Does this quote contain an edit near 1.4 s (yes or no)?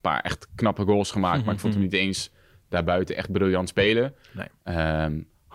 no